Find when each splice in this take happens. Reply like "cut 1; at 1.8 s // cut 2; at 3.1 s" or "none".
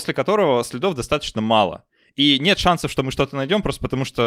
none